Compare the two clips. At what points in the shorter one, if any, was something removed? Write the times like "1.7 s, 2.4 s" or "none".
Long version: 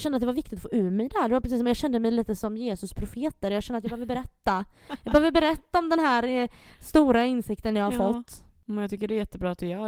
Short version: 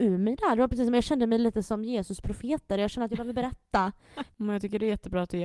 4.3 s